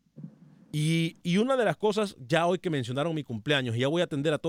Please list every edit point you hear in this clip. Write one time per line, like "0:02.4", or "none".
0:01.2